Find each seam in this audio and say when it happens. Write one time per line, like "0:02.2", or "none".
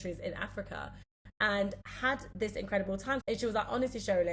0:03.2